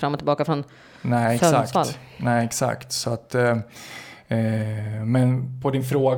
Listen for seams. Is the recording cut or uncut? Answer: uncut